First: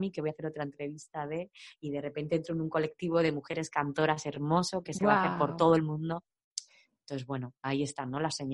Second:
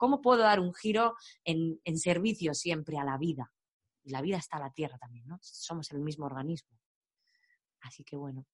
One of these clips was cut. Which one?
second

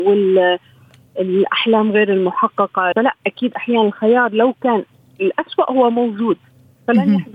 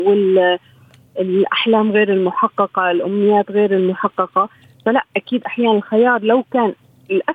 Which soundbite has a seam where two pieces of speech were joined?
first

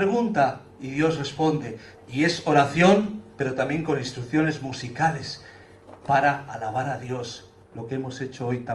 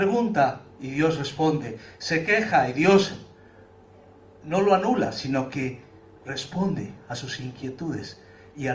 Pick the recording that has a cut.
first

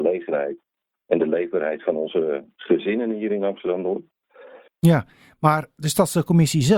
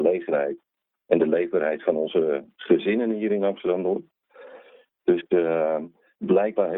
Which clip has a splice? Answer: first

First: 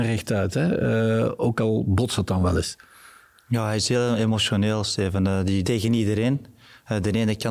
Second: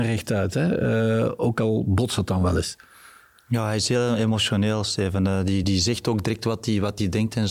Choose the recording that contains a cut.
first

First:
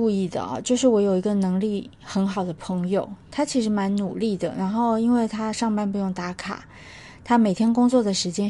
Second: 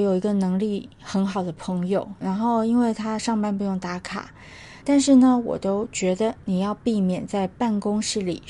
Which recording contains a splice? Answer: second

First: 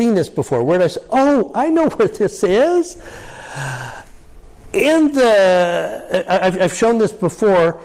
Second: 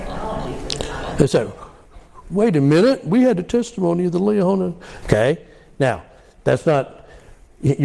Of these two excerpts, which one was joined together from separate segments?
second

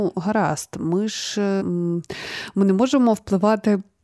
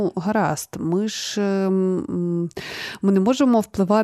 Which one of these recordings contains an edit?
first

